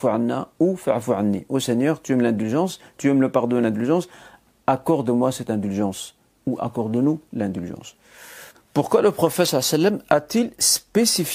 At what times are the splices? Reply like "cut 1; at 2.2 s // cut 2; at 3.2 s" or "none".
cut 1; at 3.0 s // cut 2; at 8.5 s